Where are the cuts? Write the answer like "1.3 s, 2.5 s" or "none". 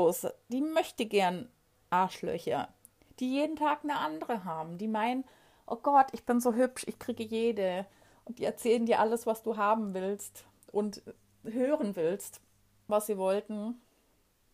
12.9 s